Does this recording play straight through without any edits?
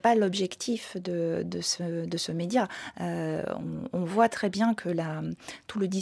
yes; 0 cuts

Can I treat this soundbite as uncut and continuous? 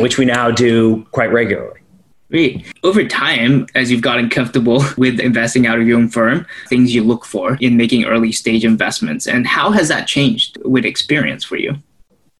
no; 2 cuts; at 3.7 s, 6.7 s

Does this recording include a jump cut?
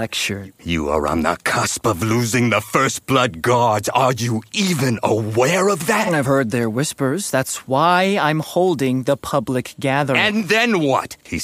no; 0 cuts

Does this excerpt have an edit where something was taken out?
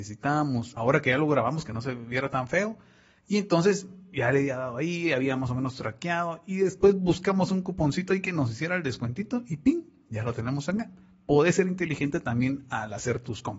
no; 0 cuts

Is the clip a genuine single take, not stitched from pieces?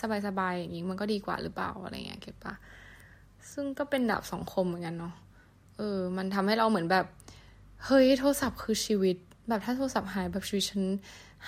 yes; 0 cuts

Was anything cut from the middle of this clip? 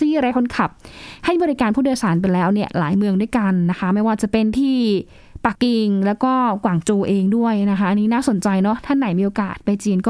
yes; 1 cut; at 5.6 s

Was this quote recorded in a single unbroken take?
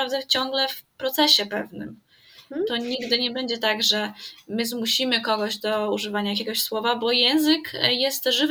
yes; 0 cuts

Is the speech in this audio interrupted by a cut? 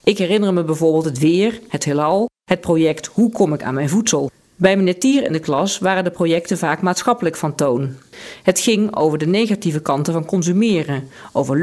no; 0 cuts

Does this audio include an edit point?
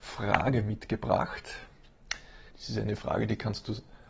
yes; 1 cut; at 2.5 s

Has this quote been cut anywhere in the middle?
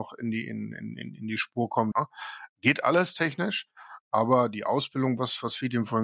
yes; 1 cut; at 1.9 s

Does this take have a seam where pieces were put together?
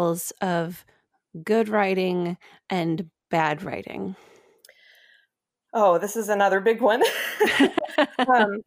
no; 0 cuts

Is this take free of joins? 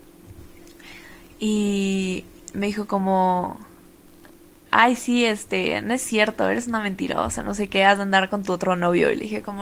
yes; 0 cuts

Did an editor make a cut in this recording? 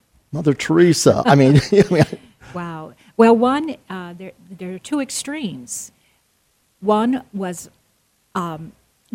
no; 0 cuts

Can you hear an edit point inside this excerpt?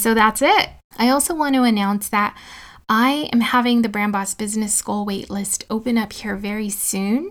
yes; 1 cut; at 0.9 s

